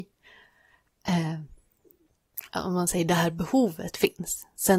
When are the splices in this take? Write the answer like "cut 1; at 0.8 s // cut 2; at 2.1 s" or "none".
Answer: cut 1; at 2.5 s